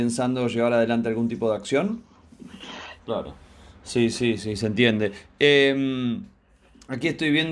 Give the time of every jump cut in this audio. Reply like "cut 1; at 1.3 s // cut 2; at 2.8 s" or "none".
cut 1; at 3.0 s // cut 2; at 4.4 s